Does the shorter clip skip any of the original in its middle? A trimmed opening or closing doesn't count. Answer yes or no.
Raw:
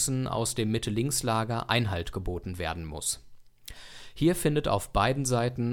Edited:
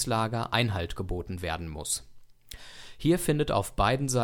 no